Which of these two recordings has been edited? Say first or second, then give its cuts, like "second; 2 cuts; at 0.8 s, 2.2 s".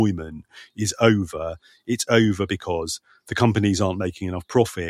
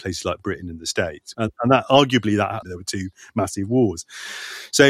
second; 2 cuts; at 1.3 s, 2.6 s